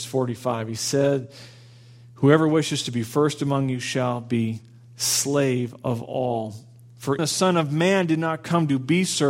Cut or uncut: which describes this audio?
cut